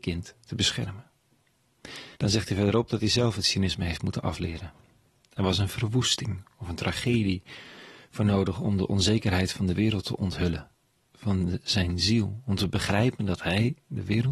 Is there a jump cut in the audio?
yes; 1 cut; at 2.1 s

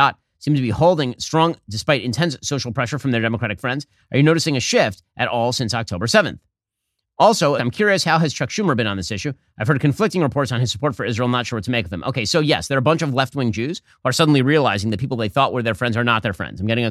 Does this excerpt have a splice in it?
yes; 1 cut; at 7.6 s

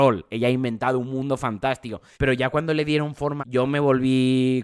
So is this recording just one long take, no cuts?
no; 2 cuts; at 2.1 s, 3.4 s

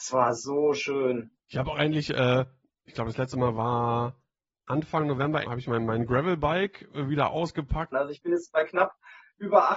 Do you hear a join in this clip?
yes; 3 cuts; at 1.4 s, 5.4 s, 7.9 s

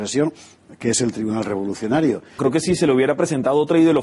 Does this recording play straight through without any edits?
no; 1 cut; at 2.4 s

